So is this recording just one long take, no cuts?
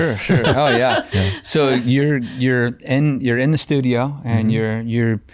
yes; 0 cuts

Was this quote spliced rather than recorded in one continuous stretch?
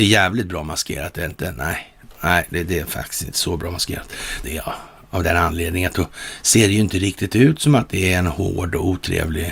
yes; 1 cut; at 4.4 s

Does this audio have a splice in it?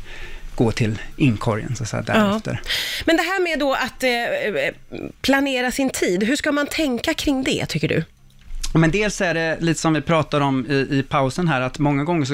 no; 0 cuts

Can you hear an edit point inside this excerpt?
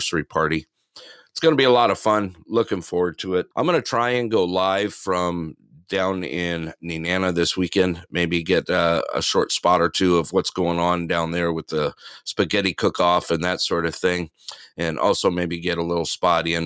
yes; 1 cut; at 3.5 s

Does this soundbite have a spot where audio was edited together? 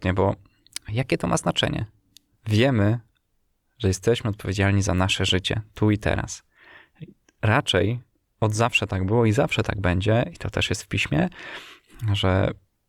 yes; 1 cut; at 2.3 s

